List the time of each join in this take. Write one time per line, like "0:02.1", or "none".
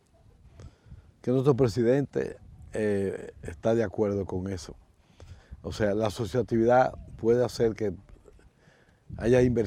none